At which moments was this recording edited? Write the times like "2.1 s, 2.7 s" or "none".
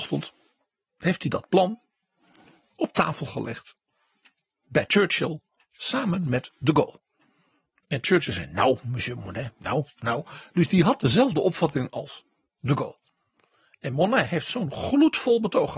none